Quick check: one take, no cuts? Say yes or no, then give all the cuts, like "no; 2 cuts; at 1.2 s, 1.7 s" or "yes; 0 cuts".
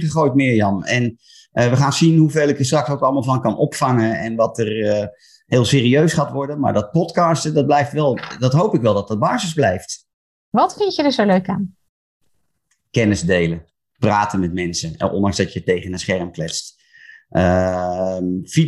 yes; 0 cuts